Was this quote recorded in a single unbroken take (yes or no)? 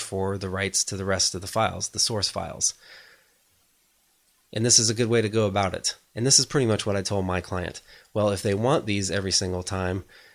yes